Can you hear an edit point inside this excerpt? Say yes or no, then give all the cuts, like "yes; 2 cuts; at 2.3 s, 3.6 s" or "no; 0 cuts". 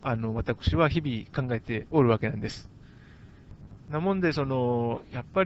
yes; 1 cut; at 3.8 s